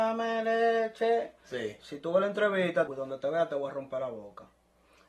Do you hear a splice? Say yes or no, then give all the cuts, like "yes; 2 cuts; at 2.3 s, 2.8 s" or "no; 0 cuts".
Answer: yes; 1 cut; at 2.9 s